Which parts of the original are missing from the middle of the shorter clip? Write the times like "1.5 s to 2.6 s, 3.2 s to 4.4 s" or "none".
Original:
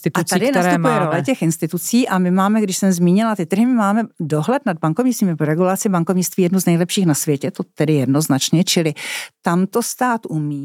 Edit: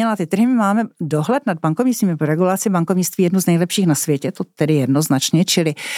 none